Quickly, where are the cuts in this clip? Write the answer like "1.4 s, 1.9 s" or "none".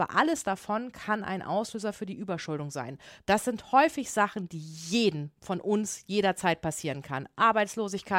3.2 s